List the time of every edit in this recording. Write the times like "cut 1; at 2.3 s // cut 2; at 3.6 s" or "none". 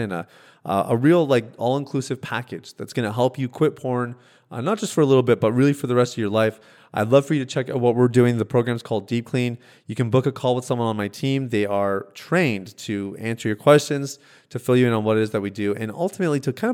none